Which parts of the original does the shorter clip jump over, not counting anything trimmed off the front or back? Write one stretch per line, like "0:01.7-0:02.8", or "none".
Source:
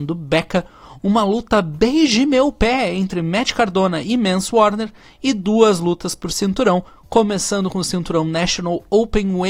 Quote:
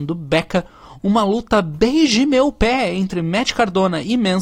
none